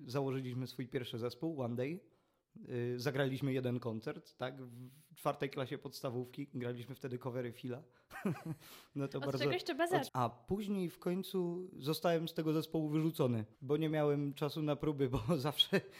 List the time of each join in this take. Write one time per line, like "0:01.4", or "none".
0:10.1
0:13.5

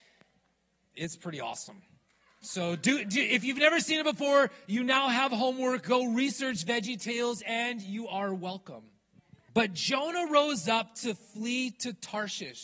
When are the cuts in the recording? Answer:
0:09.5

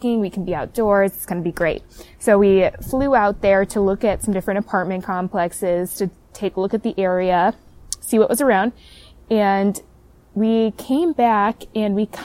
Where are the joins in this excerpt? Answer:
none

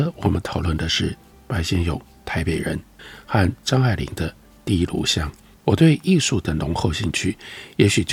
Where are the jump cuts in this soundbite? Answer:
0:05.6

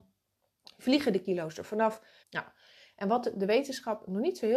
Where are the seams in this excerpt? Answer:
0:02.2

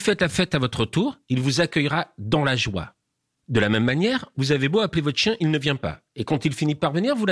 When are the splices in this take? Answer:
0:04.3

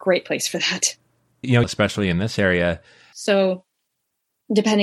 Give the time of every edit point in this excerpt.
0:01.6
0:03.1

